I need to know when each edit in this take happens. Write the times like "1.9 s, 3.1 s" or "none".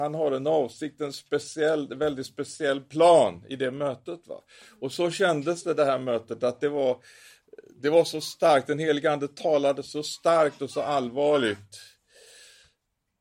none